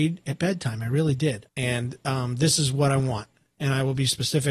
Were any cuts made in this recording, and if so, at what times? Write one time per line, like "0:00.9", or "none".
0:01.5